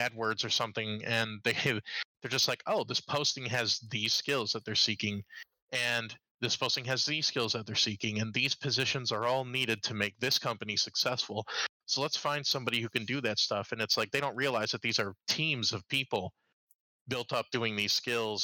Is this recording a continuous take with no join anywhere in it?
yes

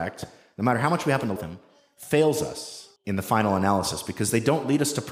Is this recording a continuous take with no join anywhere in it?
no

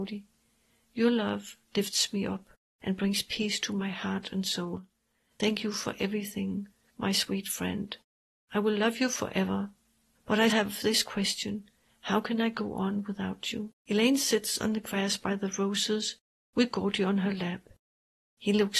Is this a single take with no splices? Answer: no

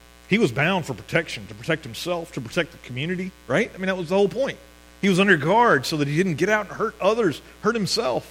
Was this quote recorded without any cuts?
yes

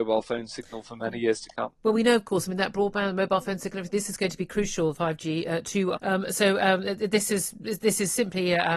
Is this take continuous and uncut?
no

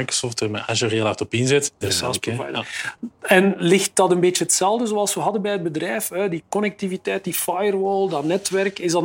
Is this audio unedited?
no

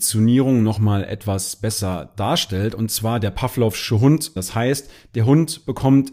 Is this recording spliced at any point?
yes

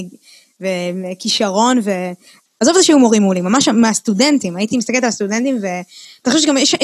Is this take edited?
yes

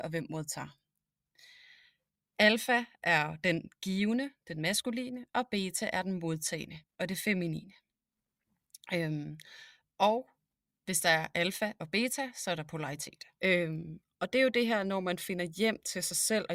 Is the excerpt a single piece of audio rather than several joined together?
no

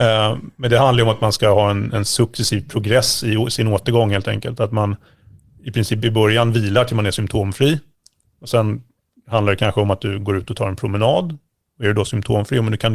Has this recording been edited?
no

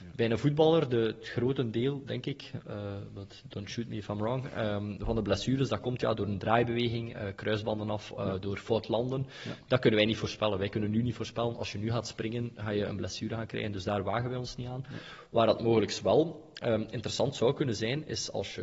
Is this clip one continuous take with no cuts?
yes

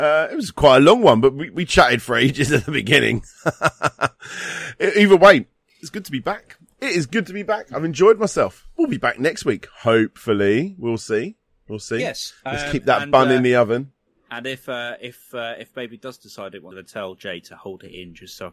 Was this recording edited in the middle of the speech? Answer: no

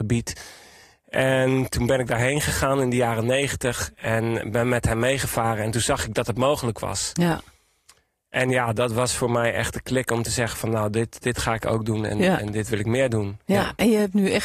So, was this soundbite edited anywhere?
no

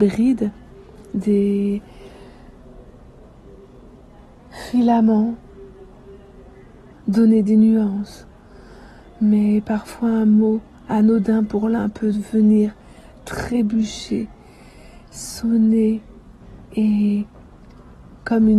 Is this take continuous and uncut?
no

